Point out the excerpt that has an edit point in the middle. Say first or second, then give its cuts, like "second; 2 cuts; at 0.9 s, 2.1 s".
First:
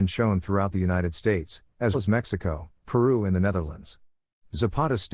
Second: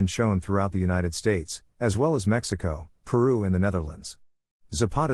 first; 1 cut; at 1.9 s